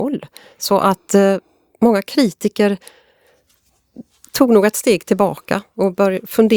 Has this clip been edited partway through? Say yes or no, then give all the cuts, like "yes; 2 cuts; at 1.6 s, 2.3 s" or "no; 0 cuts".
no; 0 cuts